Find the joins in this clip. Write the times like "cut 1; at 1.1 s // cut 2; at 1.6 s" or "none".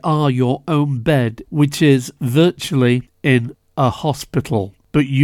cut 1; at 1.4 s